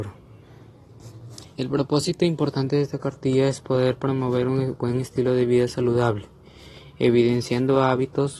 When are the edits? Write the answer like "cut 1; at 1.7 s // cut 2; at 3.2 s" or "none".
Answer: cut 1; at 1.4 s